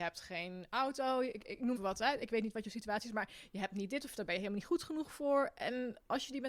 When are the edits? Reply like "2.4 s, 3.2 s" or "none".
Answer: 1.8 s

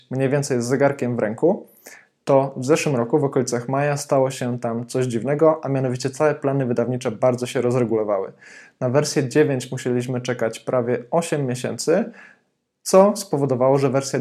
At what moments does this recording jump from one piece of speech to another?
none

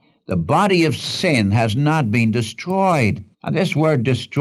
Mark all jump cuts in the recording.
3.3 s

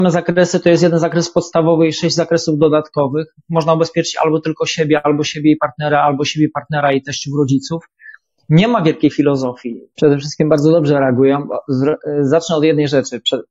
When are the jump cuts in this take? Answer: 9.9 s

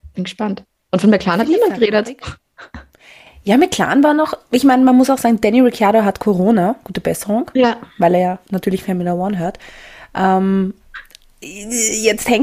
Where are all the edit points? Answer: none

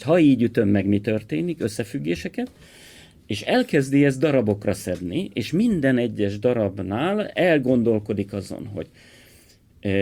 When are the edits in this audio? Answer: none

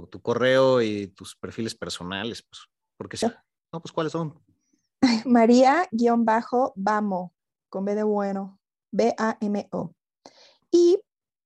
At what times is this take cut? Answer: 3.2 s

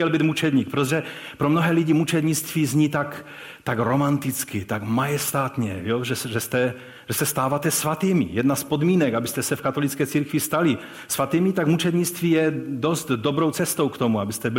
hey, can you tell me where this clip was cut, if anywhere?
none

